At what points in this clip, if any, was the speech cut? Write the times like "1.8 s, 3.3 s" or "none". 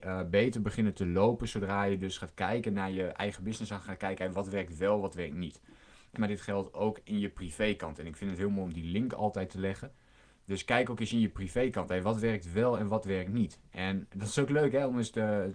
6.2 s